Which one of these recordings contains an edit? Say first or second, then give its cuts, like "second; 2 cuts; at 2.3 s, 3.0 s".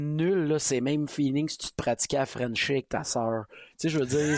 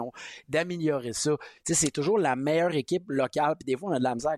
second; 1 cut; at 1.6 s